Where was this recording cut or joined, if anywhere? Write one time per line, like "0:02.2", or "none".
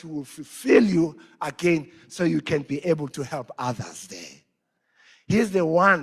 none